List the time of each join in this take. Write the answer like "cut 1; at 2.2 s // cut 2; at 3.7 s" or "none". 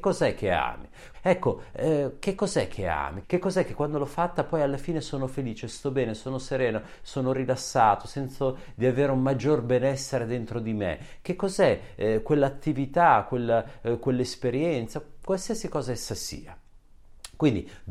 cut 1; at 1.1 s // cut 2; at 3.2 s